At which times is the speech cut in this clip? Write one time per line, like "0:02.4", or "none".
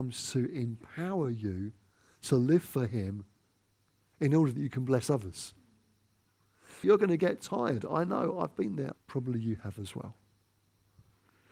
0:06.8
0:08.9